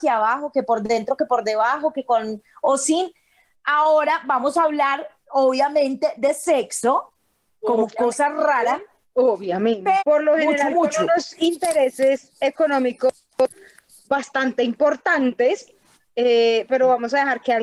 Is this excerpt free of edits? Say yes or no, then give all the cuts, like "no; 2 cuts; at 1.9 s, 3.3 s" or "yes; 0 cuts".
no; 1 cut; at 10.0 s